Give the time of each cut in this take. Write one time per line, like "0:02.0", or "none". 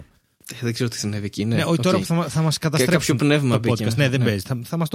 none